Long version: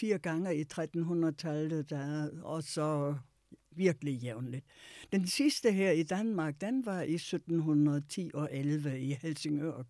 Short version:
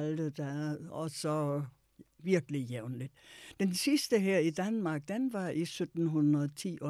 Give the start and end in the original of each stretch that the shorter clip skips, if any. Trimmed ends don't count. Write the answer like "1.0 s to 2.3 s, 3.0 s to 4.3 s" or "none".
none